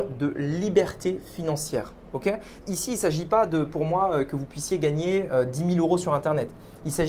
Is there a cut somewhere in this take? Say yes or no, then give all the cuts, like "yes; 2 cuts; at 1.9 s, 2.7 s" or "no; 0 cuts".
yes; 1 cut; at 2.6 s